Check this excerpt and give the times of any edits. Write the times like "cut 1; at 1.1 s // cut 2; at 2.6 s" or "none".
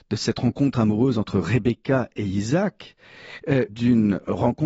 cut 1; at 3.7 s